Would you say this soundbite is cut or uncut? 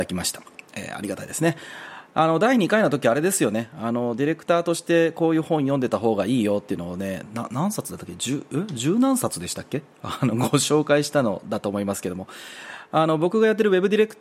uncut